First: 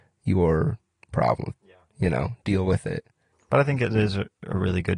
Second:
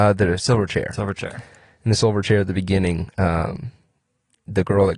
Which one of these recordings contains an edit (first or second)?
first